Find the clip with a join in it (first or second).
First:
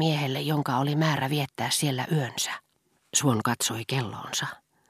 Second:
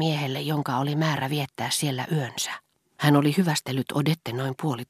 second